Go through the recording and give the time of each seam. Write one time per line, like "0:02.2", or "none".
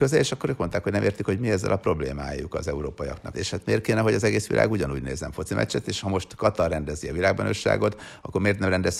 0:03.3

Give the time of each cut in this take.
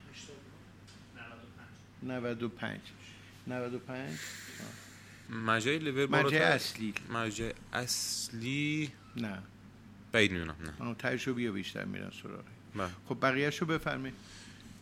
0:05.3

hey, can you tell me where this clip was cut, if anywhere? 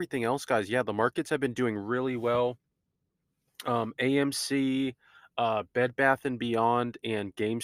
none

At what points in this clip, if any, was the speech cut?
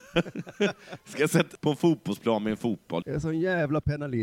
0:01.6
0:03.0

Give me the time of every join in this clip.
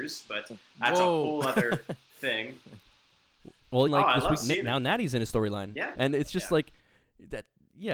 0:03.9
0:05.9

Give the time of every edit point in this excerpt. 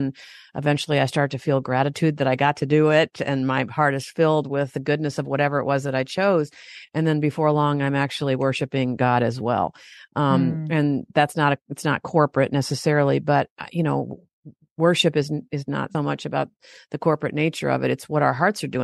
0:15.9

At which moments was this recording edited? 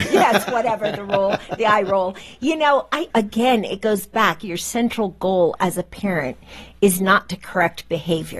0:03.1

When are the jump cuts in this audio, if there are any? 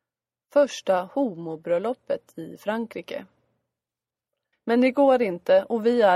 0:04.5

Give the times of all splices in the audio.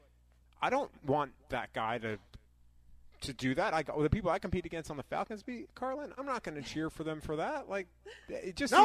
0:06.2

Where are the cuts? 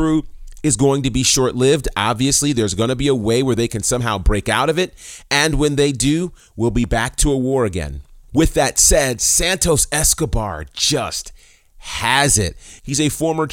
none

